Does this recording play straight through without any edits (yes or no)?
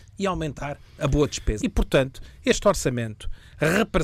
no